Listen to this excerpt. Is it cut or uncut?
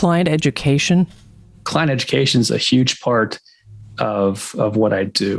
uncut